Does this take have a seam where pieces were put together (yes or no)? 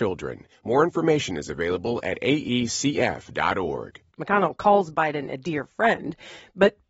yes